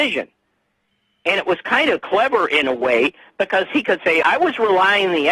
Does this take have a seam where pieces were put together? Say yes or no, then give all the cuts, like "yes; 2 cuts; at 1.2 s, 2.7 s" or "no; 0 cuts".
yes; 1 cut; at 4.2 s